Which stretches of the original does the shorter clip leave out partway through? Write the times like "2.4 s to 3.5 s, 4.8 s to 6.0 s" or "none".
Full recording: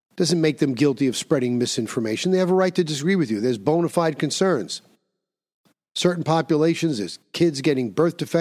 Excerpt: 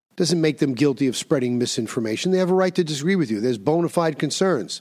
none